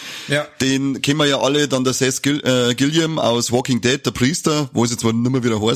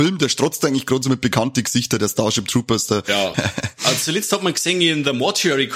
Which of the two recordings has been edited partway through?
second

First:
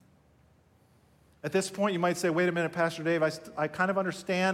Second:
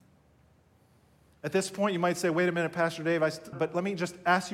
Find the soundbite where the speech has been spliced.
second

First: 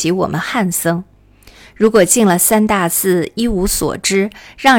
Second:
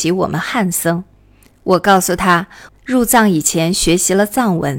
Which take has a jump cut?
second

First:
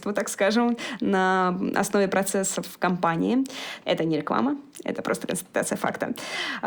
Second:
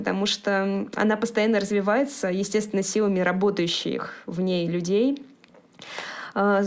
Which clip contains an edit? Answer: first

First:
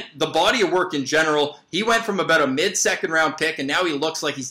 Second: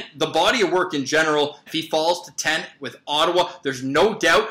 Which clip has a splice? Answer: second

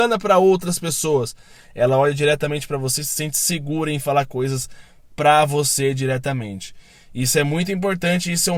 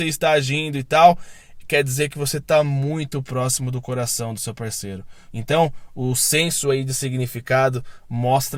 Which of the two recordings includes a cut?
second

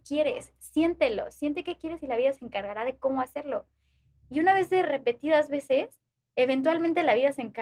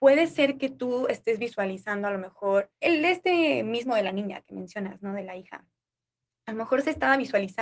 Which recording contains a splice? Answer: second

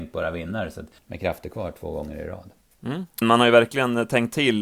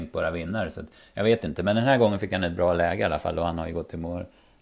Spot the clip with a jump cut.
first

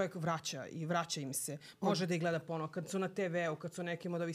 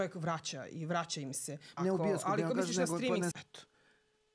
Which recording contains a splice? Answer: second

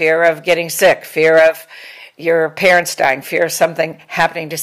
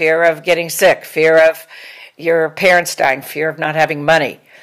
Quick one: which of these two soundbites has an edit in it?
second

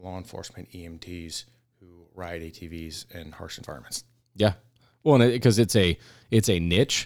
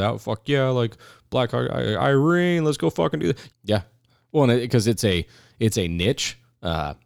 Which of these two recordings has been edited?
second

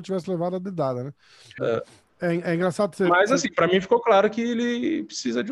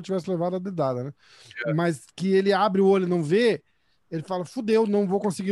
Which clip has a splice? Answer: first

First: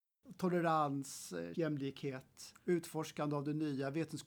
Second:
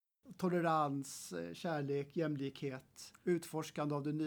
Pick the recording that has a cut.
first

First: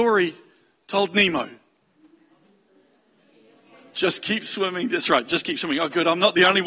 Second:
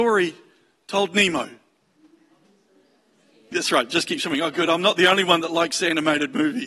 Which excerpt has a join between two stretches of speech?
second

